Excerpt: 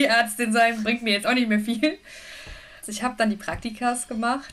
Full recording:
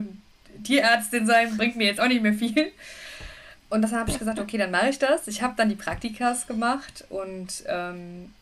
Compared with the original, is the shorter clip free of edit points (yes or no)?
no